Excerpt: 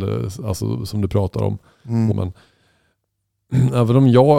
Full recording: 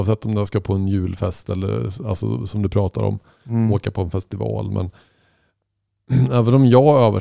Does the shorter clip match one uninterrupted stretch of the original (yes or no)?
no